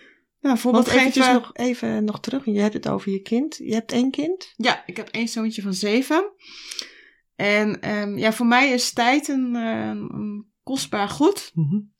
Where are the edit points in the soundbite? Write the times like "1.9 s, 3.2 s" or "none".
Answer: none